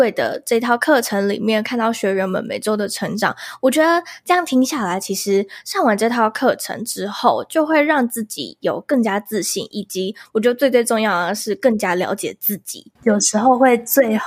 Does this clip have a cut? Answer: yes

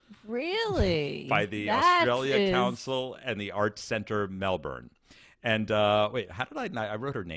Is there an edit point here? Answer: no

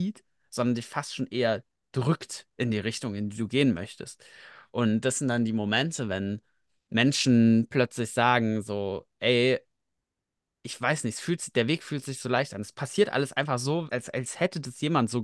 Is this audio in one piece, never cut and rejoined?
no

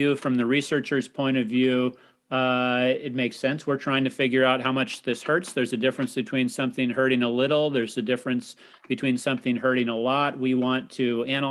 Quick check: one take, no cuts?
yes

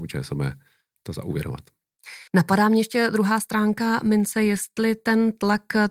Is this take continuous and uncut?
no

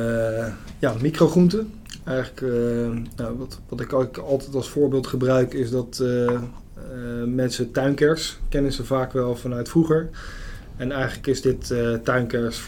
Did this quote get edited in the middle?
no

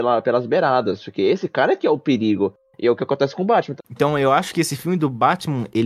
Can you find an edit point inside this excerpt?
yes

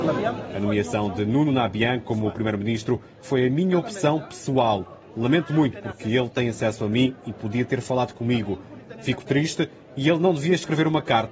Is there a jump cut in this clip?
no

